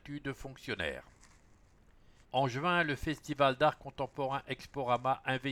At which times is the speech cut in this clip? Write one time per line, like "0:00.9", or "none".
0:02.2